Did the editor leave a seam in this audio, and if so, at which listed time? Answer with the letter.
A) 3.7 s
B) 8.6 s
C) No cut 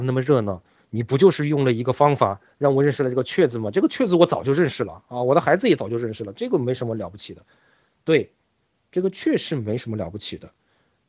C